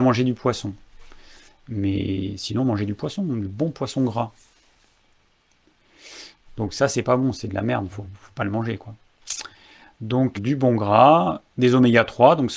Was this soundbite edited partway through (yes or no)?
yes